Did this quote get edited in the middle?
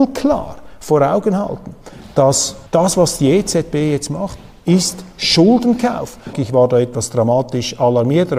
yes; 2 cuts; at 2.7 s, 6.3 s

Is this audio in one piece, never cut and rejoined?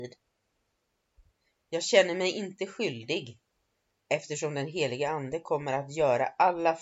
yes; 0 cuts

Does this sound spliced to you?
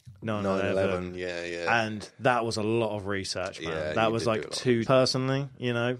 yes; 1 cut; at 4.9 s

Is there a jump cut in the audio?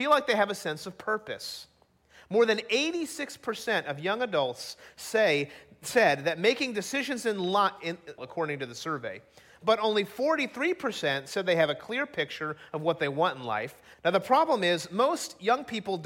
yes; 2 cuts; at 8.2 s, 13.9 s

